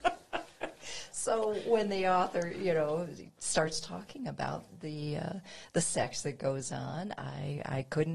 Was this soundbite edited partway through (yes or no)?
no